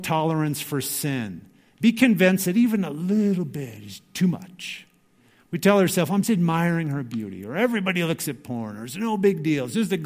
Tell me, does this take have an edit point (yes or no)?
yes